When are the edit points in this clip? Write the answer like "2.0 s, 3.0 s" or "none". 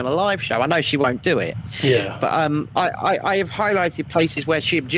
none